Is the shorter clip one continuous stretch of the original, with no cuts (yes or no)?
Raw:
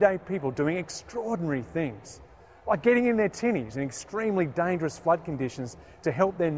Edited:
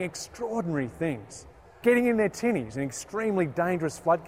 no